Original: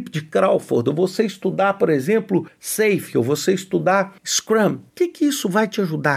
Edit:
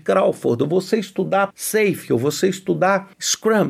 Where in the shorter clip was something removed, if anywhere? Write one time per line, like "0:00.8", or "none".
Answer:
0:01.5